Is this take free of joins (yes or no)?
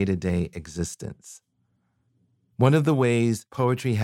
no